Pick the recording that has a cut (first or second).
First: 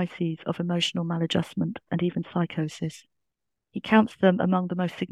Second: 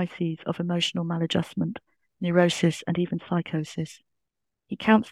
first